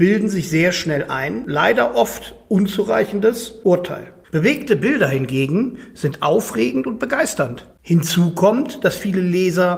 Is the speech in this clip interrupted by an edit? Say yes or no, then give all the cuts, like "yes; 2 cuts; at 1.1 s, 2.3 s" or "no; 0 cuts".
yes; 2 cuts; at 4.2 s, 7.7 s